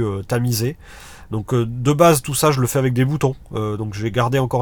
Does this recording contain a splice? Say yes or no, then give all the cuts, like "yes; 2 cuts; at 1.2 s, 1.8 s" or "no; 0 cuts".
no; 0 cuts